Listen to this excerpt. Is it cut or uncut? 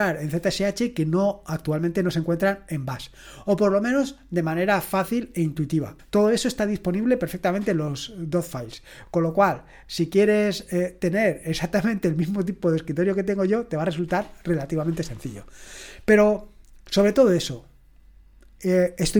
cut